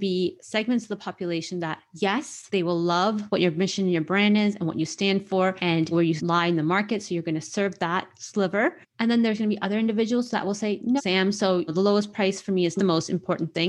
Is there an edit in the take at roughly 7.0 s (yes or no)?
no